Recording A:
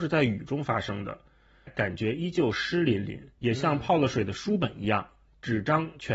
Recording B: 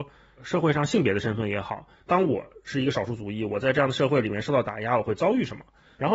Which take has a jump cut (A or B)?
A